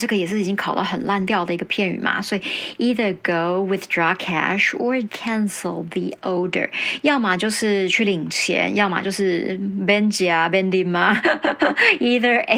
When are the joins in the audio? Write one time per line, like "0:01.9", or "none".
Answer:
0:05.1